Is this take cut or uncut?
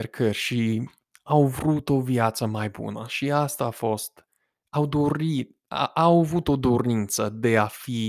uncut